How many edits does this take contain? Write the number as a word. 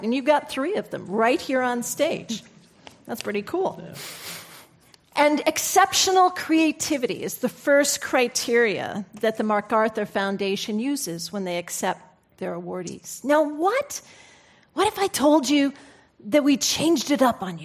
zero